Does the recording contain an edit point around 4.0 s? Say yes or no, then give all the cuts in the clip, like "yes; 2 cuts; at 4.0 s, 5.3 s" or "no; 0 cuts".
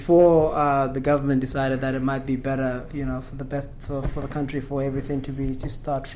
yes; 1 cut; at 4.0 s